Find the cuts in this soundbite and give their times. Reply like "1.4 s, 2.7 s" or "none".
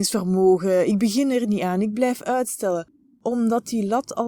none